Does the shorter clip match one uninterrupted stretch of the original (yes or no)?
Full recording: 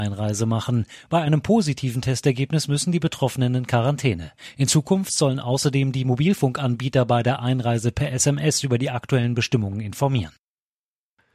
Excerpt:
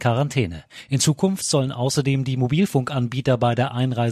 yes